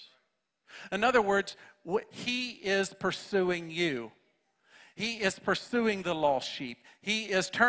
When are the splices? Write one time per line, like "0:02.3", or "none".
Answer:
0:02.1